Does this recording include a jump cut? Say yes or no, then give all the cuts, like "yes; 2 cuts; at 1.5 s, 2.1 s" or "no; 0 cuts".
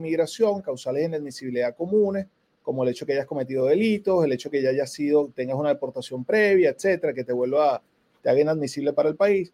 no; 0 cuts